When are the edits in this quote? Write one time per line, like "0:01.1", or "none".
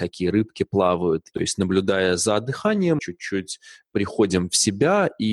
0:01.3
0:03.0